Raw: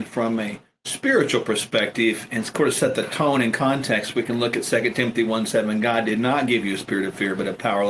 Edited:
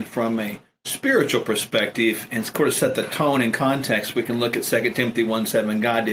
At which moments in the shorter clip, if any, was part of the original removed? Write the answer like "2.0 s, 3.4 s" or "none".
none